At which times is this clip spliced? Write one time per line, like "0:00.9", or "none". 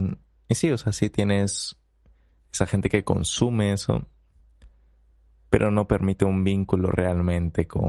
none